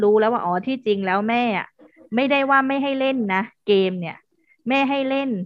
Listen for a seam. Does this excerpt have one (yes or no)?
no